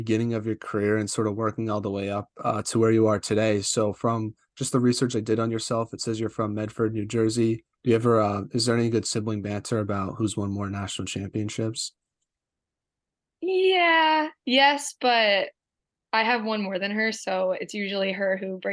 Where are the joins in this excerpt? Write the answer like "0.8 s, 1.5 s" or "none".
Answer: 7.7 s